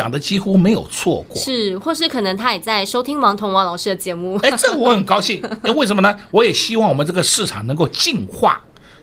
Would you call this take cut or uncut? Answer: uncut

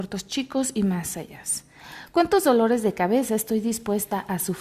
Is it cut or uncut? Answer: uncut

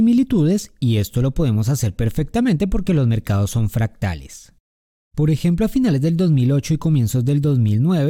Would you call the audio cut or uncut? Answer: cut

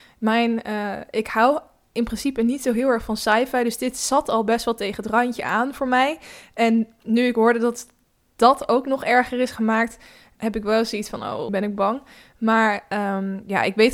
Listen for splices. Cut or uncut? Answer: cut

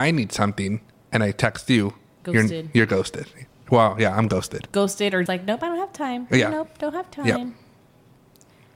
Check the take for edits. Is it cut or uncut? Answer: cut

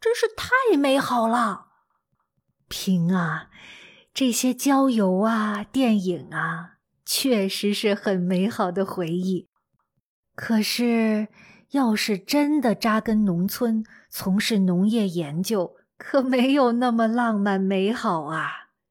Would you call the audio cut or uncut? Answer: uncut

